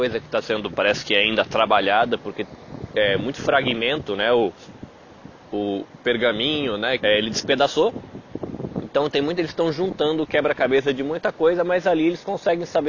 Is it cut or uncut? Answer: cut